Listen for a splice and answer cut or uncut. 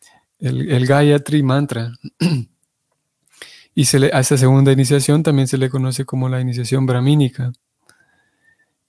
uncut